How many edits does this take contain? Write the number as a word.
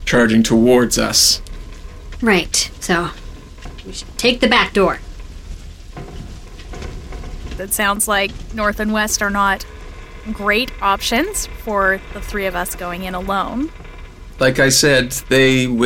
two